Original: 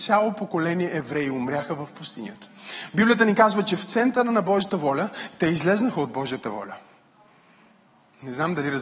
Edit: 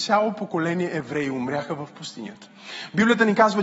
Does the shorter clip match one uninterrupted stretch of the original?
yes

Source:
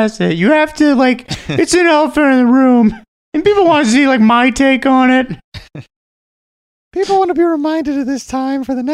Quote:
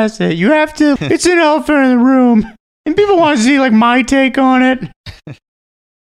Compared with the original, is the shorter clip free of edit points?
no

